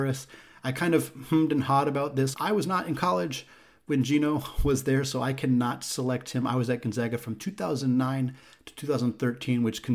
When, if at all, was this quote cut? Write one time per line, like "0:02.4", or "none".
0:02.3

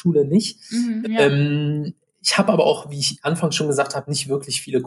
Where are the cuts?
0:01.0

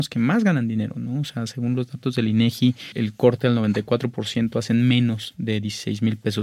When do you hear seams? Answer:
none

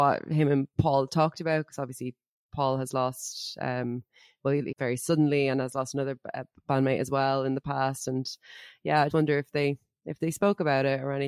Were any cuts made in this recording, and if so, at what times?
0:04.7
0:09.1

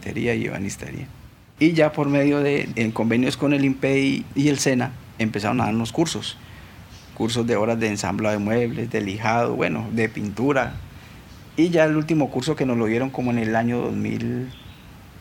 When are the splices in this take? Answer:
0:01.6

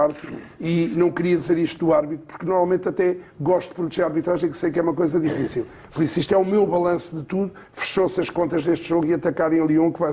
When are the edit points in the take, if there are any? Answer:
0:07.7

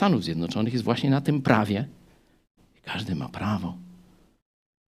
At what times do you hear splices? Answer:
0:02.6

